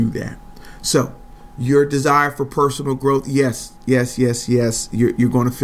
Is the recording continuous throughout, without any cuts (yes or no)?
yes